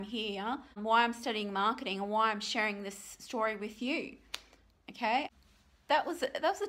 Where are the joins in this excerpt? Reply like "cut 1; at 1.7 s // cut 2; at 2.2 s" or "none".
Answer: none